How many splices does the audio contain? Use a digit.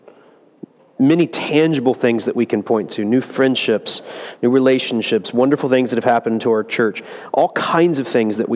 0